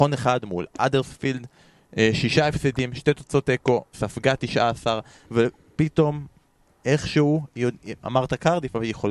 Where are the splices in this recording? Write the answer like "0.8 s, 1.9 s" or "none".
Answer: 3.9 s, 5.2 s